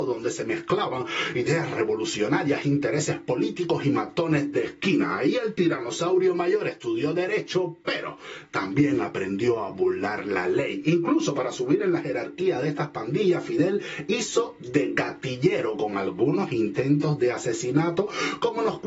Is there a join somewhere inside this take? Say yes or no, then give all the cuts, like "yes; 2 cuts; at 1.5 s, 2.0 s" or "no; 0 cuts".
no; 0 cuts